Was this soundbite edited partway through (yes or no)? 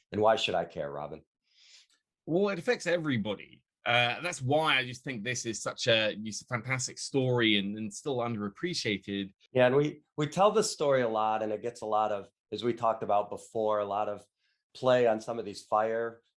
yes